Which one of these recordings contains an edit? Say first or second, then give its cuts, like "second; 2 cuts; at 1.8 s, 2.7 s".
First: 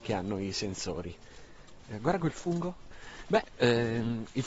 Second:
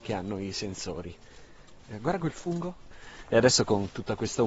first; 1 cut; at 3.2 s